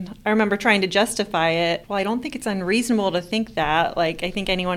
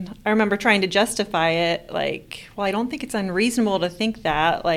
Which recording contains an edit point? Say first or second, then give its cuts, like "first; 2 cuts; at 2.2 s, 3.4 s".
first; 1 cut; at 1.8 s